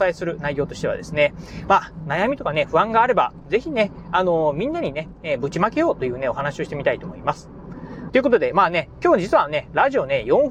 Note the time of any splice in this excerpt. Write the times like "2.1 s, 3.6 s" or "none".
8.1 s